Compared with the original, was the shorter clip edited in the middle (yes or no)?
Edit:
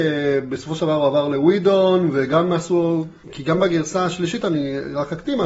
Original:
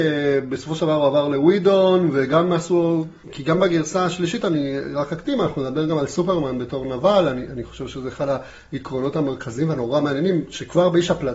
no